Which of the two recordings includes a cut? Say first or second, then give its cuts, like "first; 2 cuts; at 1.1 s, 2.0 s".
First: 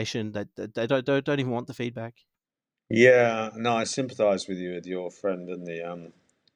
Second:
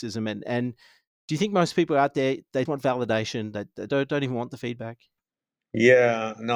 second; 2 cuts; at 2.7 s, 3.9 s